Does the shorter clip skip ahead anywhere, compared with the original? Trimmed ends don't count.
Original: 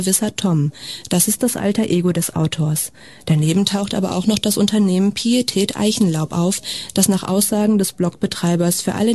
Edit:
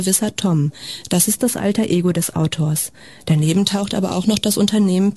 no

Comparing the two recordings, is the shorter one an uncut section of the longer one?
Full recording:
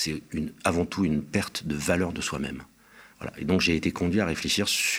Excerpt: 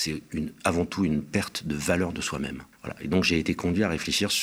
no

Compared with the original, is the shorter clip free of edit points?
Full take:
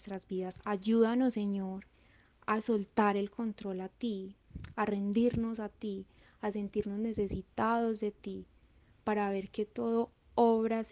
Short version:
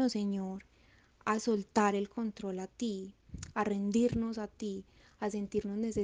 yes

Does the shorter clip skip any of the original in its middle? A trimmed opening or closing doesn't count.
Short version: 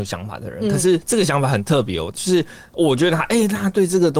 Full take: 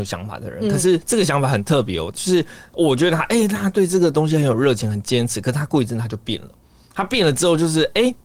no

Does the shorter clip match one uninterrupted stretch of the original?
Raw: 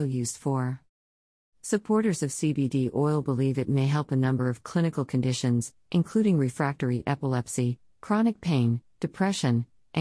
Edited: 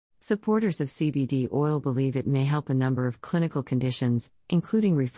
yes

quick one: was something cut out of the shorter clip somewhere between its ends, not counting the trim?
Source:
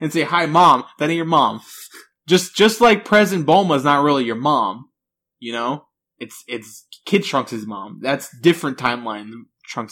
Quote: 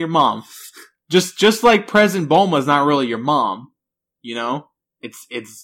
no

